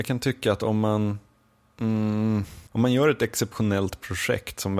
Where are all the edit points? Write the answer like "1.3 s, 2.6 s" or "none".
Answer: 2.7 s